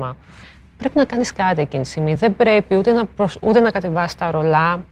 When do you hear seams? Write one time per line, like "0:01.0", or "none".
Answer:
none